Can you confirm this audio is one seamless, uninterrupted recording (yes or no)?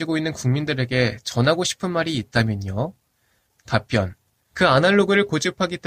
no